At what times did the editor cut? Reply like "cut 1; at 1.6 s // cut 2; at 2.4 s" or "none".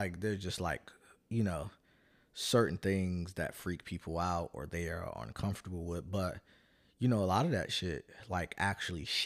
none